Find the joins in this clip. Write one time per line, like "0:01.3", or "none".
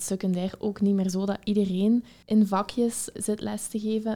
0:03.1